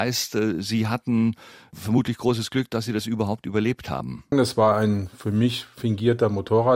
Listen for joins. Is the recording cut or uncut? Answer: cut